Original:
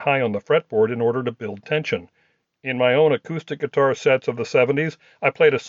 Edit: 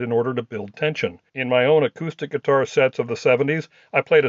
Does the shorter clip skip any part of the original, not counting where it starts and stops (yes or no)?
yes